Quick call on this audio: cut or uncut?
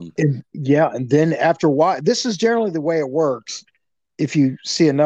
uncut